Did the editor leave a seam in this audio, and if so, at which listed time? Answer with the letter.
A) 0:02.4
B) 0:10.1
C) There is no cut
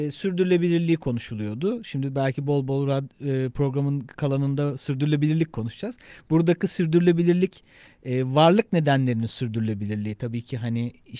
C